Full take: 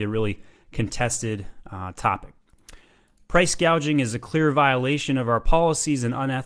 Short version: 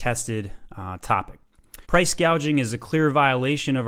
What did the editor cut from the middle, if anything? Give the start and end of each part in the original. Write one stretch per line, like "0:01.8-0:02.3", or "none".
0:02.8-0:03.3